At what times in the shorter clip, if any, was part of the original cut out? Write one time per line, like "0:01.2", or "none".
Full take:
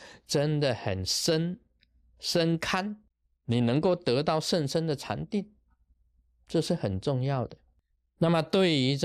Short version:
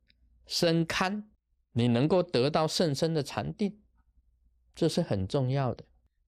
none